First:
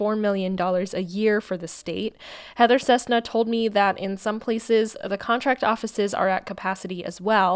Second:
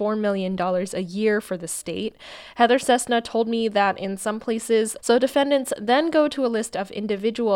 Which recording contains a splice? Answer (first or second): second